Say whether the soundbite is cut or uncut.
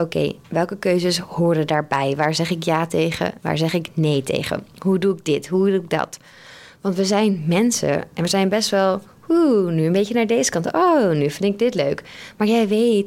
uncut